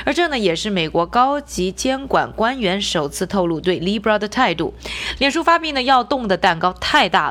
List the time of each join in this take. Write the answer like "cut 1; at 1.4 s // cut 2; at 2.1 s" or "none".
cut 1; at 5.2 s